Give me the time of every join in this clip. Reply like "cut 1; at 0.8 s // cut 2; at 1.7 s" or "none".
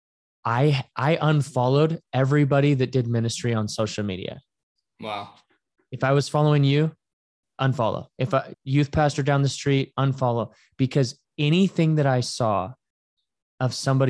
cut 1; at 8.5 s